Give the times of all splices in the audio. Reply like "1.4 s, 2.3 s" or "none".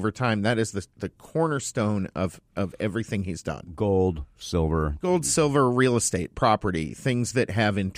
none